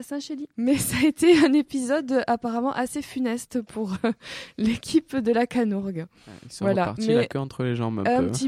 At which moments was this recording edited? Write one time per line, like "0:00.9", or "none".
none